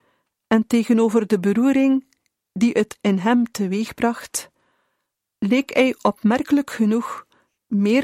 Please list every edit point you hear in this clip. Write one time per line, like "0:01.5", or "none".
none